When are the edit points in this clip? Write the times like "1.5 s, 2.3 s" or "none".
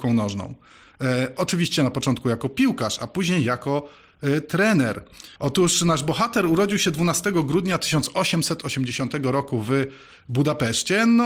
5.4 s